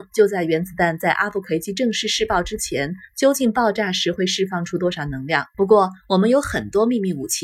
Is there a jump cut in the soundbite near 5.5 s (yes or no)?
yes